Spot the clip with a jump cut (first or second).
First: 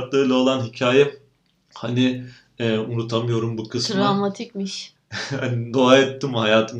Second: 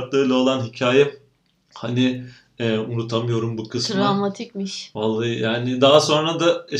first